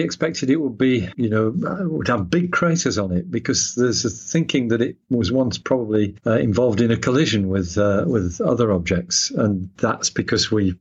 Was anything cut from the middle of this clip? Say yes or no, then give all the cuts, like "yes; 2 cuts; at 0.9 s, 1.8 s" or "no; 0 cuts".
no; 0 cuts